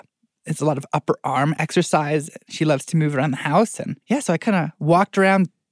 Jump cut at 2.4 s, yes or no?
no